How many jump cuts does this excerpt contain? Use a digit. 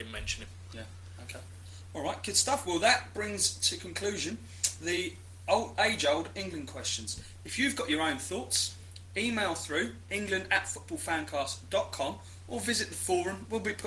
0